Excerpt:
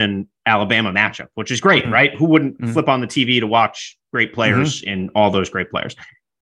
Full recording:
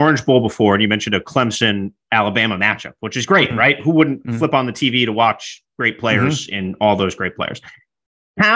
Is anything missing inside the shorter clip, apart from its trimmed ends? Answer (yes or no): no